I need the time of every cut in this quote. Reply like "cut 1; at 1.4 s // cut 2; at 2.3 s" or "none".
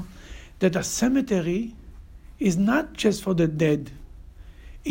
none